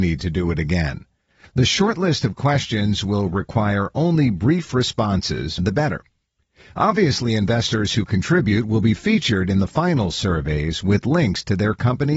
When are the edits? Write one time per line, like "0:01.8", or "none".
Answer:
0:05.6